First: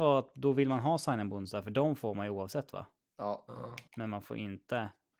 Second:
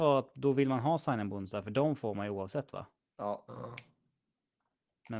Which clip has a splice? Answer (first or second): first